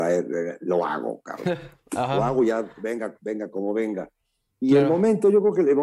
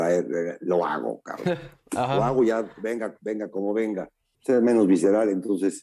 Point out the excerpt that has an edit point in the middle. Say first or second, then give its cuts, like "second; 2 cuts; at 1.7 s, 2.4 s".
second; 1 cut; at 4.3 s